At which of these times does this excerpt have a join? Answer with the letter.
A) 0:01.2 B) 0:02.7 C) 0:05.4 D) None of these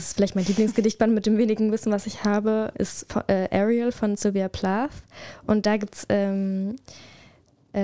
B